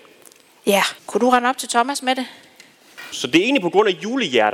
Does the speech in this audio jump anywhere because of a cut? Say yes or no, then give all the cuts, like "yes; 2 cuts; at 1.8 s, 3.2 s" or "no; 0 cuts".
yes; 2 cuts; at 1.0 s, 3.1 s